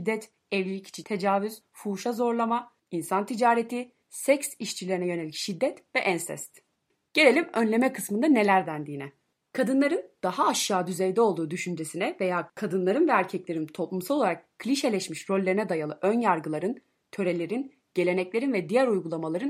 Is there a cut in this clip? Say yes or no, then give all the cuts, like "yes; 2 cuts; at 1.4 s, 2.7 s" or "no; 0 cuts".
no; 0 cuts